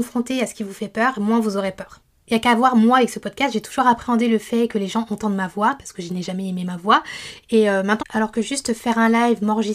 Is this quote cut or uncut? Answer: cut